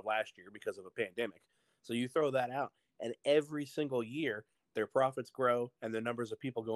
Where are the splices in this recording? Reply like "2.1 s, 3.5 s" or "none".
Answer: none